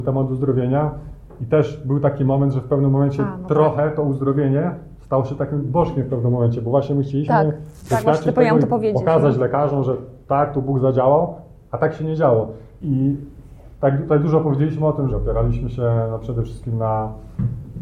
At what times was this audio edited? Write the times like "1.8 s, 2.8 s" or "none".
12.8 s, 15.1 s